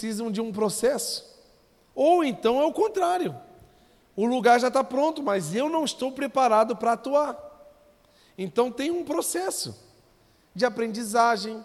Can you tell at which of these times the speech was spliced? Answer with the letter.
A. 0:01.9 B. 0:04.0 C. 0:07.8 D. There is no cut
A